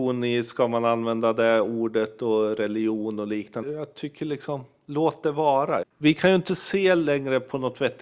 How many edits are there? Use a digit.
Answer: 2